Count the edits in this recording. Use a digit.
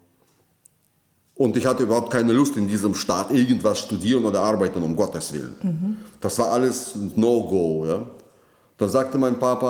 0